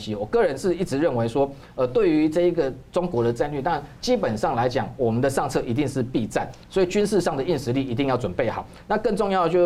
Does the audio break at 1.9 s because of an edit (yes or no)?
no